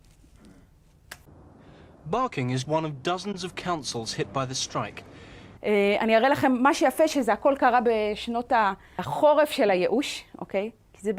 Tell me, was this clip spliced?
yes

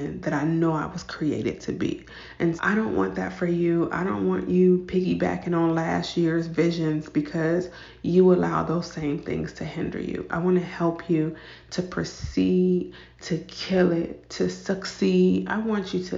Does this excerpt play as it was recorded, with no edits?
no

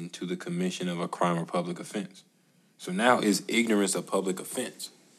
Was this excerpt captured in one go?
yes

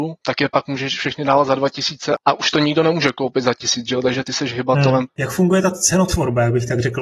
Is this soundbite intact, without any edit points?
no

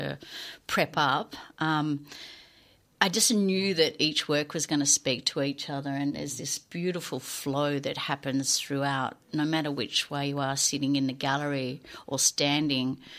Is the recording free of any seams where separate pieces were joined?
yes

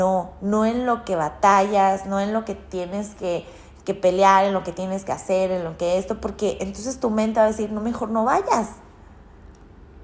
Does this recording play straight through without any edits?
yes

